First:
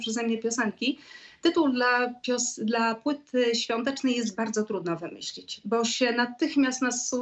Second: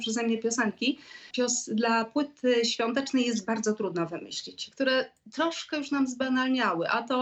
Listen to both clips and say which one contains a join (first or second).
second